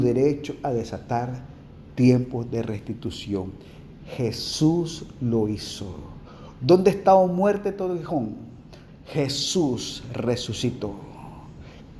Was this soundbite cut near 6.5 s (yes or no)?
no